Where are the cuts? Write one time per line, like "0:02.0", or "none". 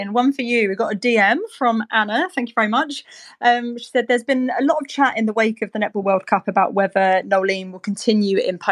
none